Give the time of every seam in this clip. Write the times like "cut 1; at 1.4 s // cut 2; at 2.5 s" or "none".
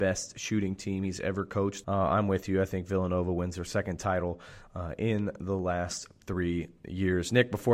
cut 1; at 1.8 s

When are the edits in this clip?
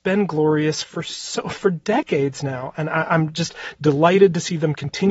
none

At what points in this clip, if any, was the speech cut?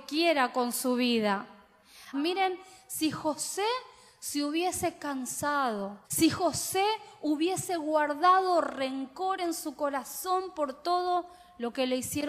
cut 1; at 2.1 s // cut 2; at 6.0 s

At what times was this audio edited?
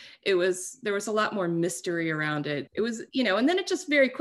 cut 1; at 2.7 s

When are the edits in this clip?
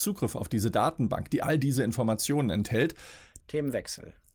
cut 1; at 3.4 s

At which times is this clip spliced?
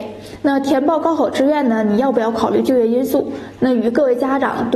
cut 1; at 3.6 s

